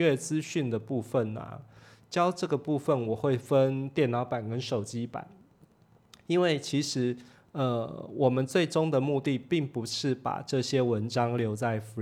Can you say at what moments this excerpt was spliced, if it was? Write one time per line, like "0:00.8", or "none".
none